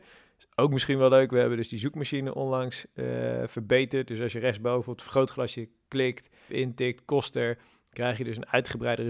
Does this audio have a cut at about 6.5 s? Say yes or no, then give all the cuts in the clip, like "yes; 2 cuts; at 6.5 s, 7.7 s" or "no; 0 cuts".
yes; 1 cut; at 6.5 s